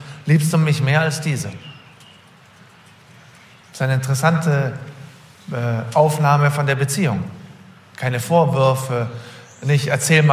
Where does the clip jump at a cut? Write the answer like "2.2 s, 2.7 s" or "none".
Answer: none